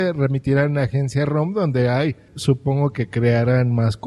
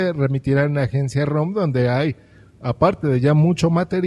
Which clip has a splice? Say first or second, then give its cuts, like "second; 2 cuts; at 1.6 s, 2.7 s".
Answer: first; 1 cut; at 2.3 s